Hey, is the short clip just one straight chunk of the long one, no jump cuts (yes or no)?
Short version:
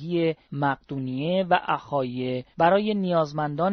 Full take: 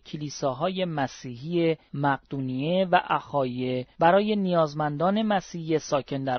yes